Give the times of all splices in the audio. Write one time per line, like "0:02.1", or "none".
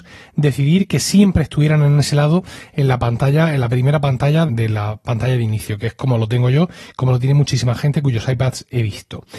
0:04.5